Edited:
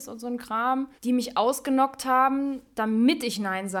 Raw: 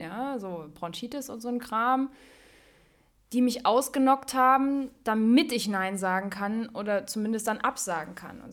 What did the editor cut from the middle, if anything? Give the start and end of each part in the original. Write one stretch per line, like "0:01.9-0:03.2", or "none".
0:02.2-0:03.2